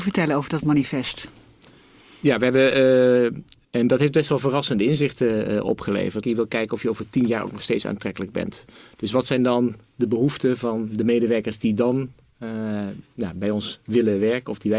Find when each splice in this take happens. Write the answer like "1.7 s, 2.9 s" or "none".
3.6 s, 6.2 s